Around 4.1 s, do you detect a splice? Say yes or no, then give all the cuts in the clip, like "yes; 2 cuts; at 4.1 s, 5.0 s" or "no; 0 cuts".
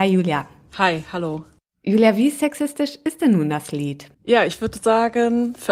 yes; 1 cut; at 4.1 s